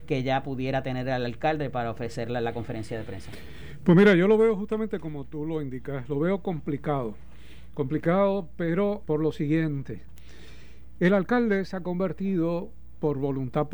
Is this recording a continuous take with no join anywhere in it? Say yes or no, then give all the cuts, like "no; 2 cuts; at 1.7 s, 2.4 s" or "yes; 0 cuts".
no; 1 cut; at 9.0 s